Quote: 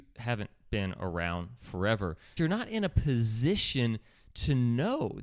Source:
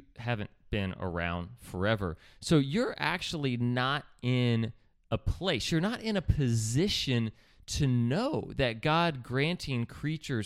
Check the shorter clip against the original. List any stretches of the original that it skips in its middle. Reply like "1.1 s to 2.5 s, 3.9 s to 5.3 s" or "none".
2.4 s to 5.7 s